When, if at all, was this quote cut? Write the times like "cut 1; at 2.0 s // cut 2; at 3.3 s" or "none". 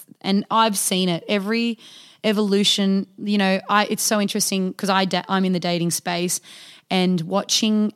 none